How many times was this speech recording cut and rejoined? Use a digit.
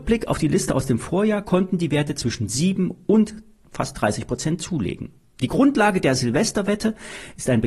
0